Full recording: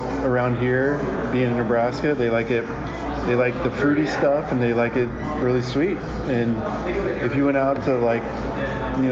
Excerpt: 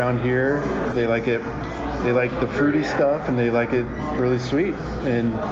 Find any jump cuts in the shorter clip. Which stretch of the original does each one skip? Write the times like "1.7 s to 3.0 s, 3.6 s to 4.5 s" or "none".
1.3 s to 2.2 s